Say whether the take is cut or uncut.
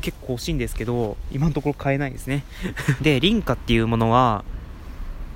cut